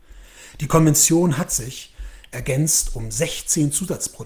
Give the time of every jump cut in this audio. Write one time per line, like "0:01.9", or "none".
none